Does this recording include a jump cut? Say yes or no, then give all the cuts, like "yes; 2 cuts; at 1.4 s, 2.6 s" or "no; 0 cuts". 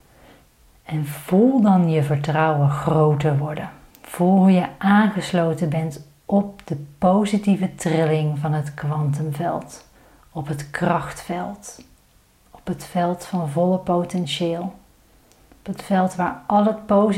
no; 0 cuts